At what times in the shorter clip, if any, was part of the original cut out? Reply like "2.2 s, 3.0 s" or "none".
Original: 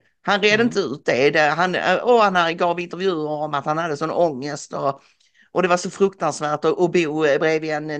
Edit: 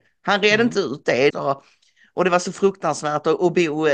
1.3 s